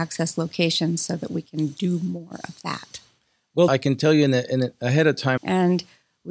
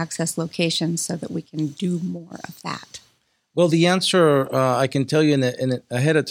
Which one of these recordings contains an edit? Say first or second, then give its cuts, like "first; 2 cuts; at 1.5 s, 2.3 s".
first; 2 cuts; at 3.7 s, 5.4 s